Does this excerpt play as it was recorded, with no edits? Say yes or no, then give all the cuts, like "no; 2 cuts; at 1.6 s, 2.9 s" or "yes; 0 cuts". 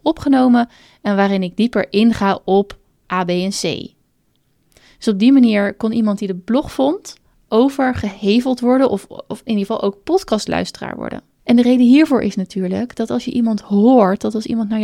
yes; 0 cuts